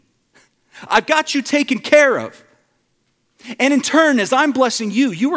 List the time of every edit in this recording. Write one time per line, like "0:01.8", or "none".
none